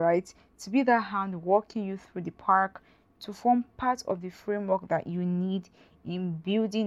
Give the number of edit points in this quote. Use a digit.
0